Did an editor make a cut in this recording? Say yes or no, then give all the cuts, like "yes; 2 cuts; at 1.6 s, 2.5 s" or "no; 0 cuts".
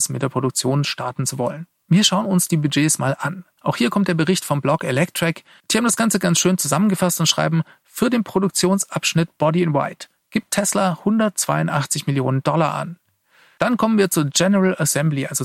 no; 0 cuts